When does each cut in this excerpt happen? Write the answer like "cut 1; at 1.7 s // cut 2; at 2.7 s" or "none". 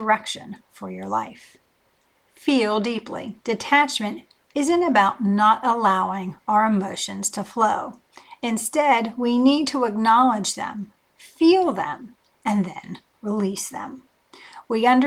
cut 1; at 3.4 s